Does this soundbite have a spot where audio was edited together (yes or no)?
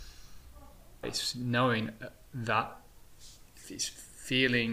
yes